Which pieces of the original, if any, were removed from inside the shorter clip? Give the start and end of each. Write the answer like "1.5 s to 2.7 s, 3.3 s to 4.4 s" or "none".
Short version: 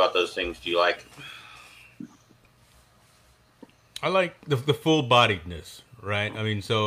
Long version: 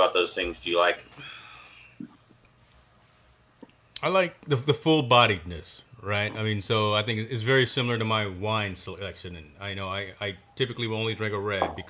none